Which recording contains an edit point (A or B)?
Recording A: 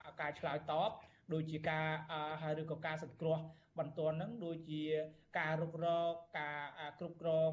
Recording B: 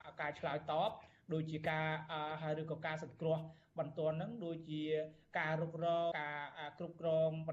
B